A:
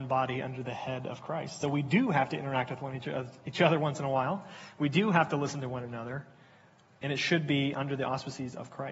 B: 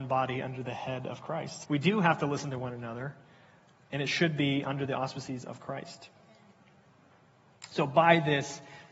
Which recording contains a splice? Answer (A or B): B